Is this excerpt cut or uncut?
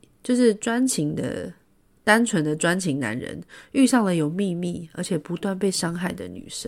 uncut